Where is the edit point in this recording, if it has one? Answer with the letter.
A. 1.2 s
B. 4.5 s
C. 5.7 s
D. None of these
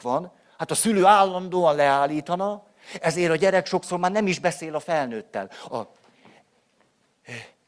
C